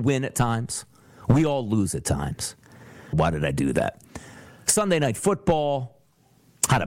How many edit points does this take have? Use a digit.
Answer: 1